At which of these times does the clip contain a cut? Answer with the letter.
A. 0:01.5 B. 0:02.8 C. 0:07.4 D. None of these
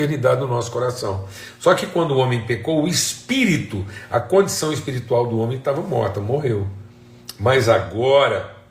D